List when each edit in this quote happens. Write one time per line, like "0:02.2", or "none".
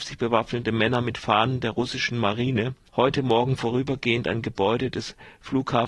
none

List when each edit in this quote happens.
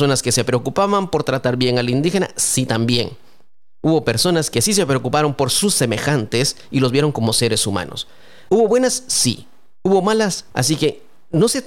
0:08.5
0:10.5

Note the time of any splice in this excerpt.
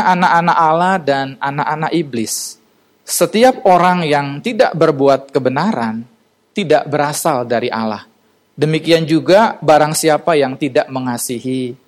none

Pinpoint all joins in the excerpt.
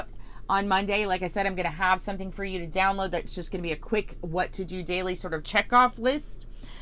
none

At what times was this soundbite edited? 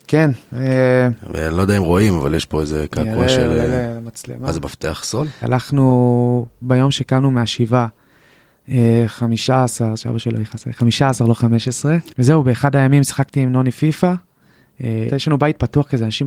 0:05.4
0:12.1
0:15.1

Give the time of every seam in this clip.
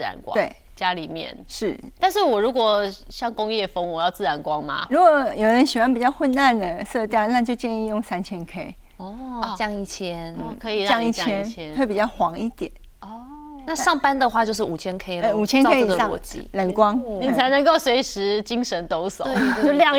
none

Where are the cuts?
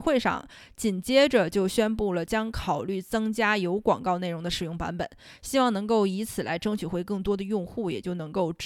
none

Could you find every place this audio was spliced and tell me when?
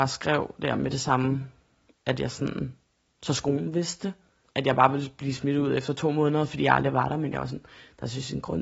0:04.5

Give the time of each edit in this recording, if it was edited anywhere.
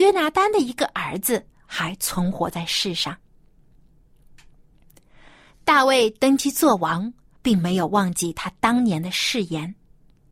0:07.4

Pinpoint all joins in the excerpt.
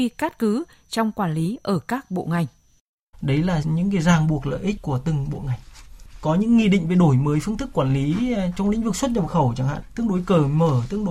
0:03.1

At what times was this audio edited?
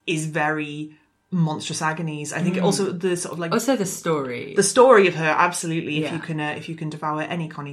none

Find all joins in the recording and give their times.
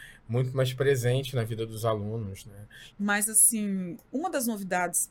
0:02.9

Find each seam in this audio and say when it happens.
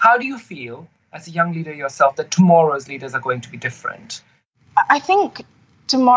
none

